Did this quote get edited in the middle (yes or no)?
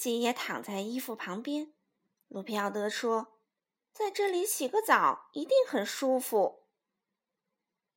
yes